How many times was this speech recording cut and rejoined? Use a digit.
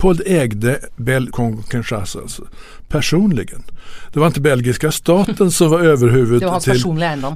1